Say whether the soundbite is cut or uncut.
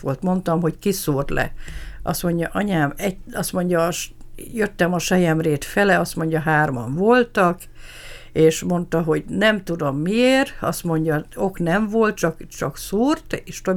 uncut